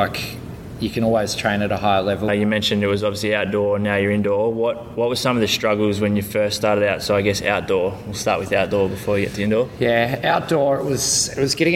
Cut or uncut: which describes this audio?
cut